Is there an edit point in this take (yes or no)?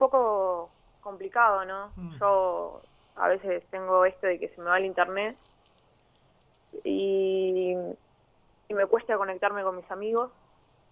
no